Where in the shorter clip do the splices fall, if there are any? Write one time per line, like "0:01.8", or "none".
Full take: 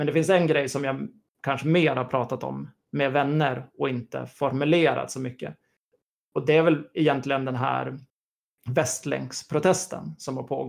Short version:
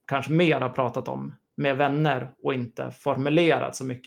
none